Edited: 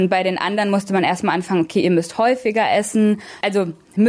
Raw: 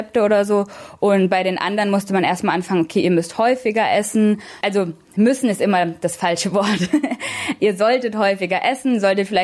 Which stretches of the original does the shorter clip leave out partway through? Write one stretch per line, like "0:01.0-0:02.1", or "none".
none